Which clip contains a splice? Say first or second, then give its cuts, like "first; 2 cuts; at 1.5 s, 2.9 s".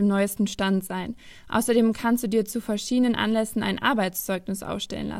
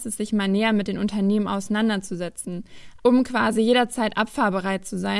second; 1 cut; at 3.0 s